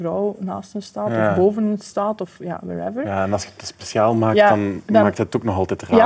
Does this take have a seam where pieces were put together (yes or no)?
no